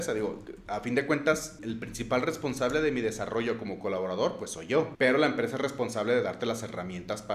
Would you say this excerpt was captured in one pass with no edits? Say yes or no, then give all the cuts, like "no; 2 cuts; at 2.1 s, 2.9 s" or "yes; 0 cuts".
no; 2 cuts; at 1.6 s, 4.9 s